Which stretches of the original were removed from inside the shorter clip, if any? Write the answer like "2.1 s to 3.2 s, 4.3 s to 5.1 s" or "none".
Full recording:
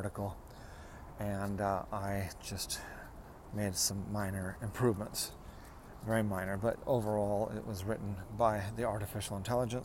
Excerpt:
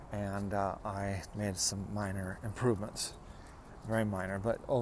2.4 s to 3.5 s